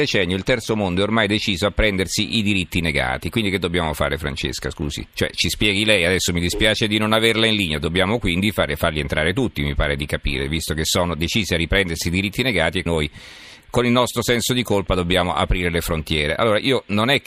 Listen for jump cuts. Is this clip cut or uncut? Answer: cut